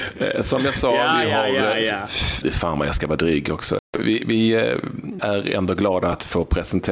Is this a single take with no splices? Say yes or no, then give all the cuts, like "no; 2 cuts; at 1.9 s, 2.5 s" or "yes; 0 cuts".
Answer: no; 3 cuts; at 2.4 s, 3.8 s, 5.2 s